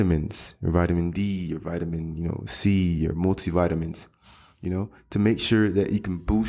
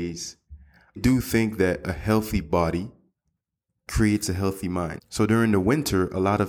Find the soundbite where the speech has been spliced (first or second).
second